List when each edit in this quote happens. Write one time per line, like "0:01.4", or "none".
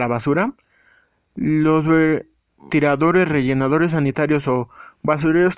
0:02.7